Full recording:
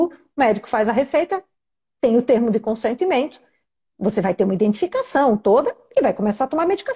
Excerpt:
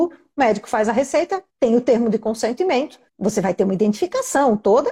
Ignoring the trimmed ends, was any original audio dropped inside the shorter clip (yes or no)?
yes